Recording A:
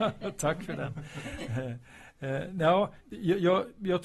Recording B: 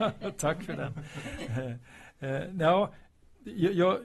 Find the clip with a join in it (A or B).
A